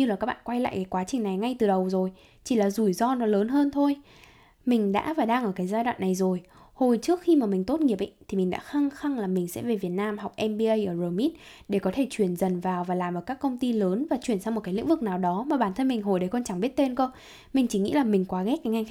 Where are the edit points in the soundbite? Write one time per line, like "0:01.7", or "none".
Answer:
none